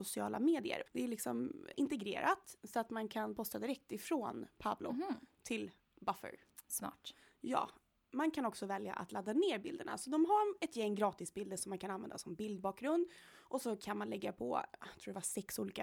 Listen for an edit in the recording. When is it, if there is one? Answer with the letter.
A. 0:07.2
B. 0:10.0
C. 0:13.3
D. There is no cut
D